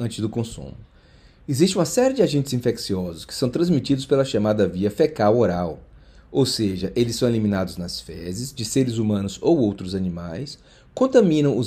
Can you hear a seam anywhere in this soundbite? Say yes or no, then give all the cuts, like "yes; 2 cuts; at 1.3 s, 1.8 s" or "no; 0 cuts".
no; 0 cuts